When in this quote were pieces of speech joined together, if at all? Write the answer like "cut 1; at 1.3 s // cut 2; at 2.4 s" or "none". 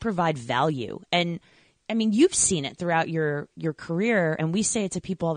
none